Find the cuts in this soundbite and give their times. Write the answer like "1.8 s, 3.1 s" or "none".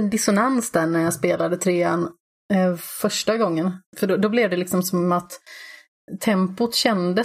3.9 s